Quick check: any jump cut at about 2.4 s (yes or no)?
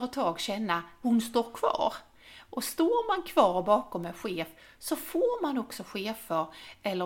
no